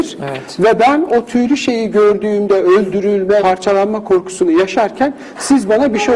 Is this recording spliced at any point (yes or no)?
yes